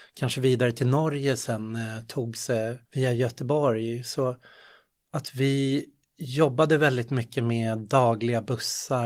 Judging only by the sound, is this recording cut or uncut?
cut